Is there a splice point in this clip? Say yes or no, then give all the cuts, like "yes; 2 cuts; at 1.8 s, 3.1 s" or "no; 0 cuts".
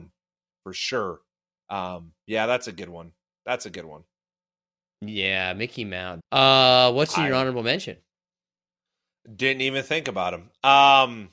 yes; 1 cut; at 6.2 s